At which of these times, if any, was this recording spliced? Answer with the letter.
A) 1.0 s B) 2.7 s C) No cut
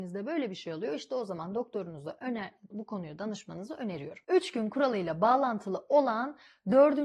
B